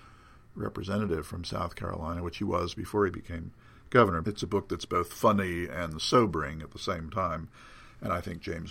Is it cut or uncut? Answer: cut